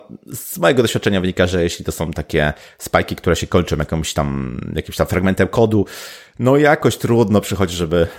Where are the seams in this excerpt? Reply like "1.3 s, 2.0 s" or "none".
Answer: none